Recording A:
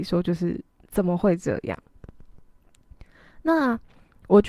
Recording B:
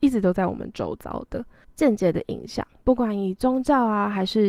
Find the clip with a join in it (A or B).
B